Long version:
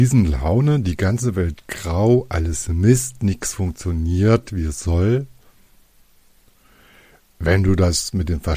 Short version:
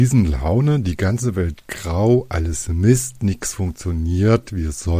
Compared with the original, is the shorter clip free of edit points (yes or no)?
yes